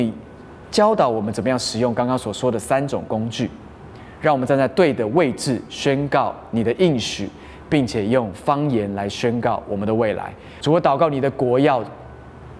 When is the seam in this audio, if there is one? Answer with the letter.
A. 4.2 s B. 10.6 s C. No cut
B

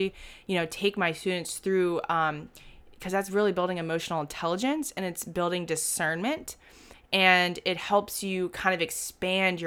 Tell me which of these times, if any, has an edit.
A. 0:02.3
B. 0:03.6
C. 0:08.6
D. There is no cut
D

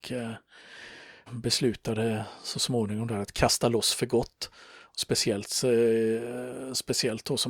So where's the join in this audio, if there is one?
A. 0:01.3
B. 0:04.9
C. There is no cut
A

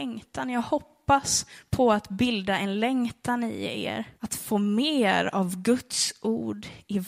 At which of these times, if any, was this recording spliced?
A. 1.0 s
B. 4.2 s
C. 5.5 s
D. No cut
B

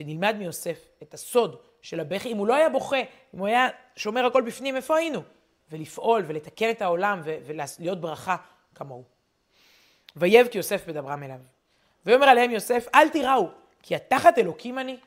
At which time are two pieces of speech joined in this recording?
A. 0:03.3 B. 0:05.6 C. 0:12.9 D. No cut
B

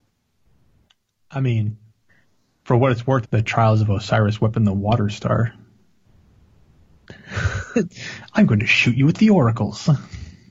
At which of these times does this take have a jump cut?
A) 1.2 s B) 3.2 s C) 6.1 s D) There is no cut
B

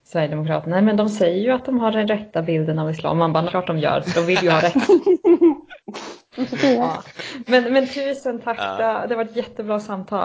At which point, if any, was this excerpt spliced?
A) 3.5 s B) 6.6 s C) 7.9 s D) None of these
A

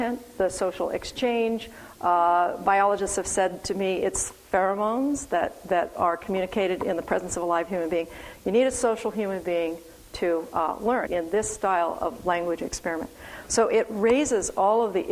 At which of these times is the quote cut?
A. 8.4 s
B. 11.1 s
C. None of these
B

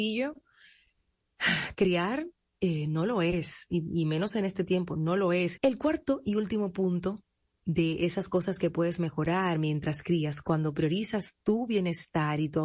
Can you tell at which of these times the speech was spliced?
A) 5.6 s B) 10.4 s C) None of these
A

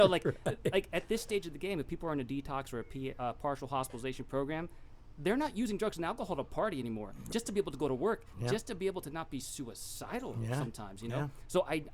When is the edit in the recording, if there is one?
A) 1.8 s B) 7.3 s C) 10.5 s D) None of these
B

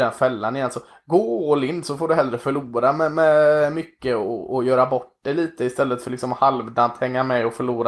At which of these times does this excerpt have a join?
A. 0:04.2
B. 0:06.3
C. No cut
C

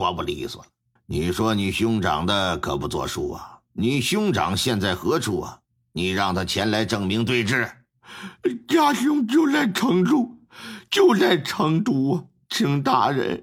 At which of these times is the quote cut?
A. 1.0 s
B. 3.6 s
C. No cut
A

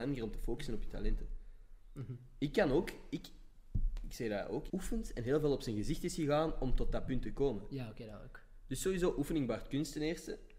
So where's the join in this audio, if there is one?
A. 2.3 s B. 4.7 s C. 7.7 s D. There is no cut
B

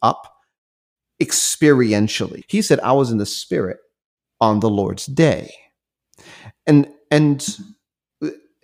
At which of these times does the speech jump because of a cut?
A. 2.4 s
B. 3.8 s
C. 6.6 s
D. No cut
A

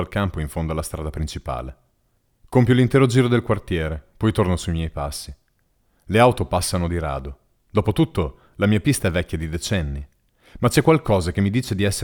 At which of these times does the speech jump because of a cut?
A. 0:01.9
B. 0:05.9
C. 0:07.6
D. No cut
C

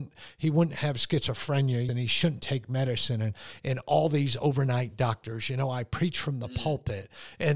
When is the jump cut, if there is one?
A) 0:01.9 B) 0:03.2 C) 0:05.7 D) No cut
A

